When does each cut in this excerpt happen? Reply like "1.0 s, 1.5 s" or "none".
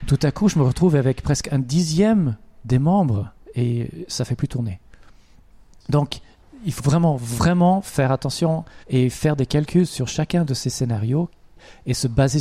6.8 s, 8.8 s